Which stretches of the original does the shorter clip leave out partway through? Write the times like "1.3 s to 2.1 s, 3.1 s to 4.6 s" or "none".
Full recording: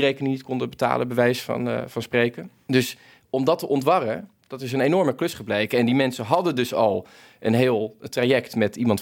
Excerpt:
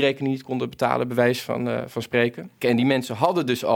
2.6 s to 5.7 s

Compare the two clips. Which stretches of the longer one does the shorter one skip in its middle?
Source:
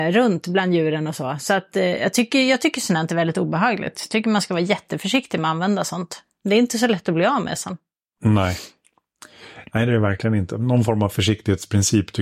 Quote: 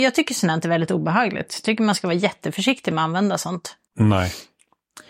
6.3 s to 8.1 s

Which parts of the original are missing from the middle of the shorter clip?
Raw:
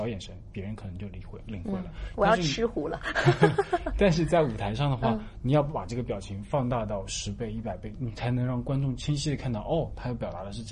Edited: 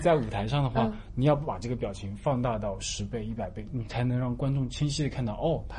none

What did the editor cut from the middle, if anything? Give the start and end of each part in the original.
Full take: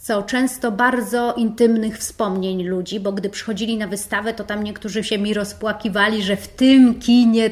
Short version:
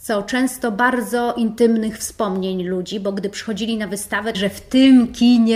4.3 s to 6.2 s

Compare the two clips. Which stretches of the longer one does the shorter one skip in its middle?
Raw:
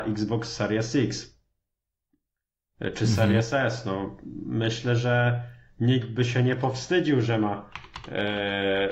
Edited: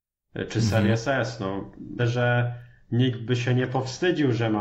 4.4 s to 4.9 s

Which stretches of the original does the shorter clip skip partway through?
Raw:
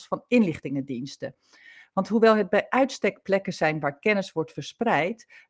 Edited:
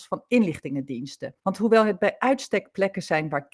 1.4 s to 1.9 s

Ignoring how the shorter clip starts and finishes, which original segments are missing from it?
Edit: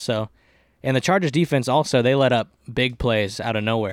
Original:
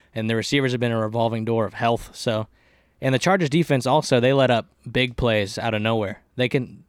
none

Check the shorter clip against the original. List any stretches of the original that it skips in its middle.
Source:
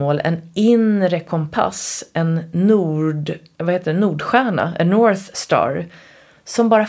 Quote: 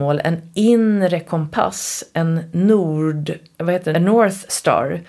3.9 s to 4.8 s

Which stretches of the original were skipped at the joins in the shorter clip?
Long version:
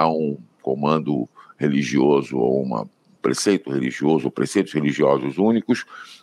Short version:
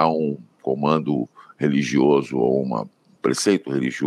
none

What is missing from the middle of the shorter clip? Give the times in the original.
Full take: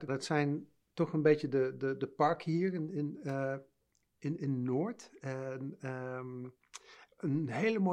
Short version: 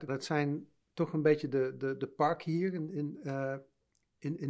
none

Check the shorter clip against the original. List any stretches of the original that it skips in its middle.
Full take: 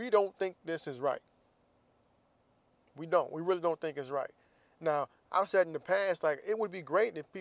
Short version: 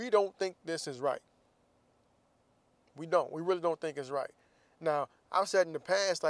none

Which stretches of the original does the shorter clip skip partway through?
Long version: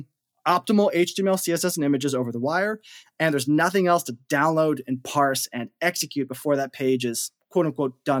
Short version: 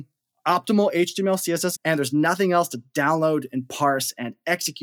1.8 s to 3.1 s

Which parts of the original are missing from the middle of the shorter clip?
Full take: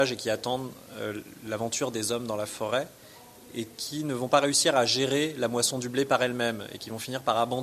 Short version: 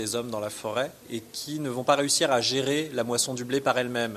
3.0 s to 3.4 s

